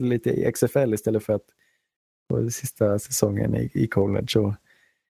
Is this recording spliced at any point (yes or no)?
no